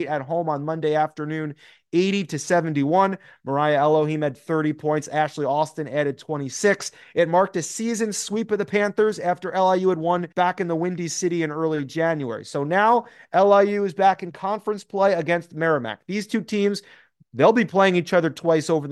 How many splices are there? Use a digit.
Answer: 1